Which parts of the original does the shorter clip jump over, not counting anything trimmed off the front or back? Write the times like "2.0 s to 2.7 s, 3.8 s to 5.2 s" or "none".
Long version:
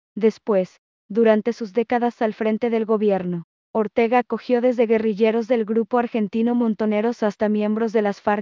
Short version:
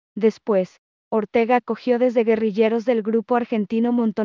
1.0 s to 3.6 s